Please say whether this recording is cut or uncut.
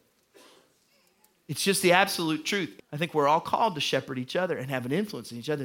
cut